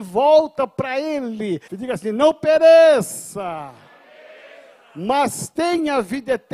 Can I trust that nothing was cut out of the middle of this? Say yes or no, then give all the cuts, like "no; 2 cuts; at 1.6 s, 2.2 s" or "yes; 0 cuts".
no; 1 cut; at 1.7 s